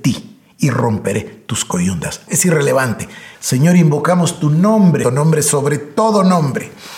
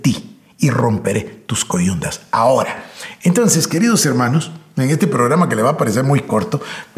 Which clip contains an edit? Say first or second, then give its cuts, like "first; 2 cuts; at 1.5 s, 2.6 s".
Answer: first; 3 cuts; at 2.3 s, 3.3 s, 5.0 s